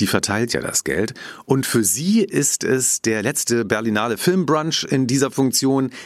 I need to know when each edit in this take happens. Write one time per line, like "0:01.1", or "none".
none